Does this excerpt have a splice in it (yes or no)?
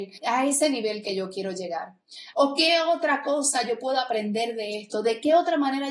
yes